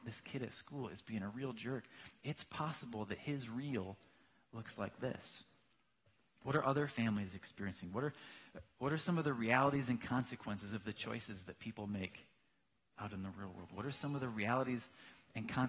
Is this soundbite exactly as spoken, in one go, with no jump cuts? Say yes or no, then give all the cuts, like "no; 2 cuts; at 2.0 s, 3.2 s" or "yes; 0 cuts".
yes; 0 cuts